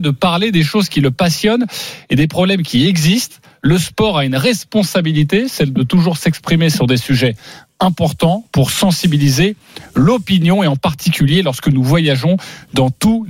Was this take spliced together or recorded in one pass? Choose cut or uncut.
uncut